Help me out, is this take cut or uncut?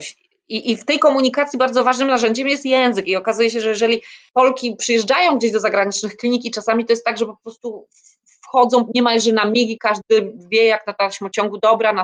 uncut